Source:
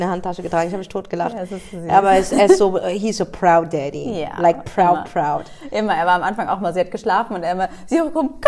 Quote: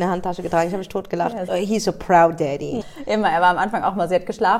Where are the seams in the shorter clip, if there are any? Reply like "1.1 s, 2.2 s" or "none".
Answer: 1.5 s, 2.8 s